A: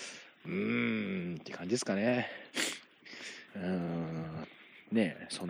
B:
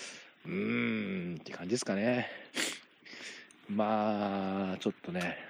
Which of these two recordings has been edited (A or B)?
A